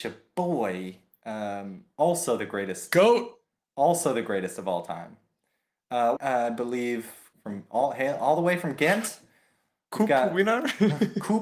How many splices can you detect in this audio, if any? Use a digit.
2